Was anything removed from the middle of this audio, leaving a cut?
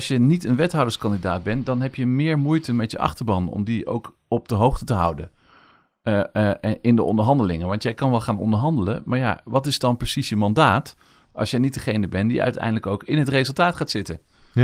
no; 0 cuts

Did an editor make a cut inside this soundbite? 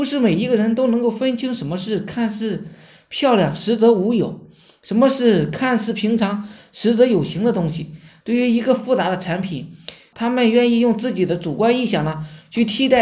yes; 2 cuts; at 8.2 s, 10.1 s

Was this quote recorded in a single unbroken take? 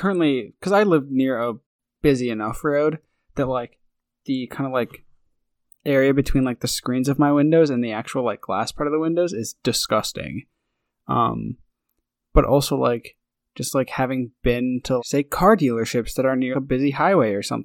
no; 2 cuts; at 15.0 s, 16.5 s

